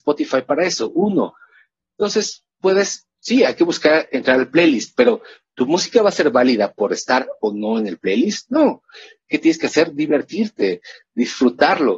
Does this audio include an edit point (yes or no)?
no